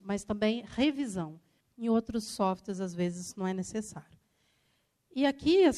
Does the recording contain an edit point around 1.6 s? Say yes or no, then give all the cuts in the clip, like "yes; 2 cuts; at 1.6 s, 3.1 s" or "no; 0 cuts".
yes; 1 cut; at 1.6 s